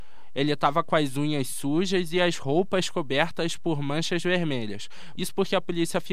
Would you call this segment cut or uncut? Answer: cut